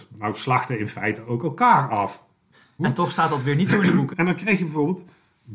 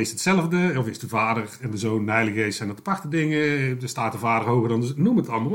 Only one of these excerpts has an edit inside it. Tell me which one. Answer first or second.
first